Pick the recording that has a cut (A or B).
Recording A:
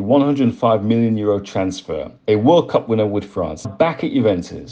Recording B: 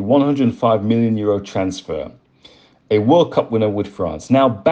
A